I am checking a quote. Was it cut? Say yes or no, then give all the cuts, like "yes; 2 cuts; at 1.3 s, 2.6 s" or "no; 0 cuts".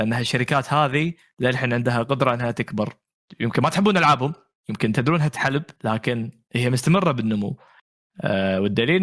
yes; 1 cut; at 5.8 s